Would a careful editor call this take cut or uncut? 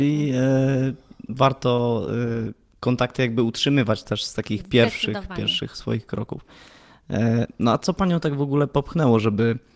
uncut